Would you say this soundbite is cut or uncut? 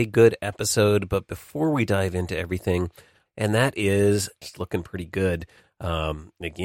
cut